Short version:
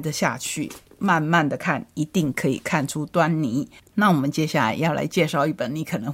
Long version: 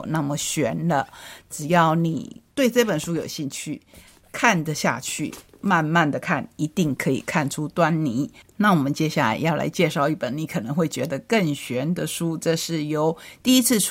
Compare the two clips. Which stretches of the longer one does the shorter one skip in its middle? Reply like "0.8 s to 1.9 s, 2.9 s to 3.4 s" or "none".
none